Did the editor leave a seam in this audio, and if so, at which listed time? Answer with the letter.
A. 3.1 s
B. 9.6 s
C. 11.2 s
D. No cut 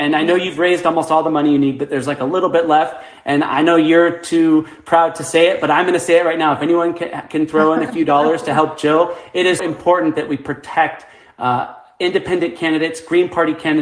B